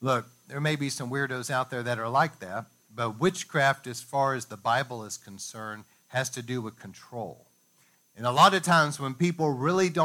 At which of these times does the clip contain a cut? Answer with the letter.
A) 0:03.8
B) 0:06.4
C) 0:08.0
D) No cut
C